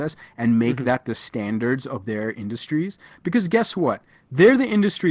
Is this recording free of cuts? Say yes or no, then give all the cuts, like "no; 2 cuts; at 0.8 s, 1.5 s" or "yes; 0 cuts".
yes; 0 cuts